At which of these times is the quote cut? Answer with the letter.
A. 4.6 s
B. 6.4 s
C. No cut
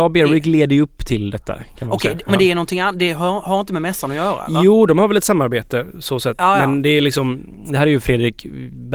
C